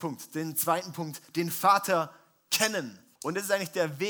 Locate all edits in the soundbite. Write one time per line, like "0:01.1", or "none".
0:03.2

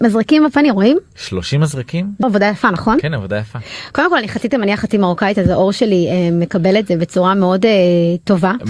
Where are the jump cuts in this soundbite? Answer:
none

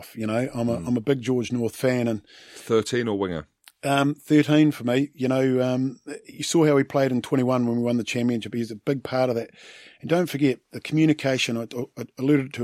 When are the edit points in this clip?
none

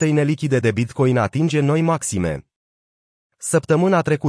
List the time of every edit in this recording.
none

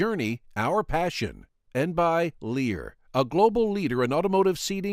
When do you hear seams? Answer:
0:01.7

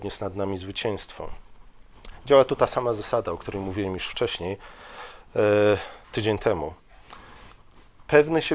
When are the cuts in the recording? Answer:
0:06.0

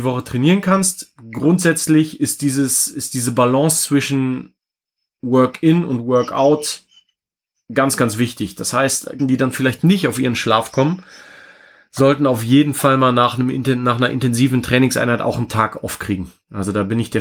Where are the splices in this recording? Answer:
0:09.2

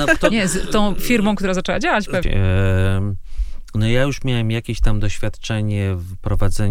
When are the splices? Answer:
0:02.2

